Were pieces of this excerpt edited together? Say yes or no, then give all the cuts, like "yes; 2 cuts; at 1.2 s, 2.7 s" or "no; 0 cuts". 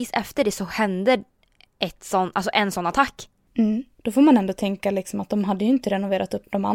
yes; 1 cut; at 4.0 s